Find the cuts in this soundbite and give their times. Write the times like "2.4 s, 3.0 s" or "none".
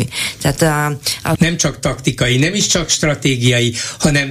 1.3 s